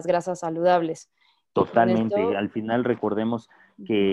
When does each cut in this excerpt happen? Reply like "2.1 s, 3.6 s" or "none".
none